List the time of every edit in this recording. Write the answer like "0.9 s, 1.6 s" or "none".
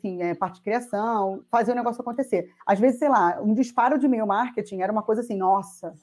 1.4 s, 2.6 s